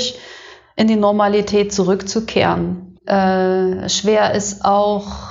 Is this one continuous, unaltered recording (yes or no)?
no